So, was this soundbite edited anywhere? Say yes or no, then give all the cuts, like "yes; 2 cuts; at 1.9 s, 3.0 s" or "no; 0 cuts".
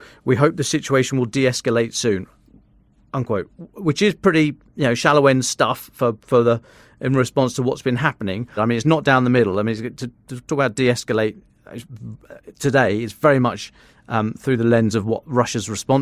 yes; 1 cut; at 8.6 s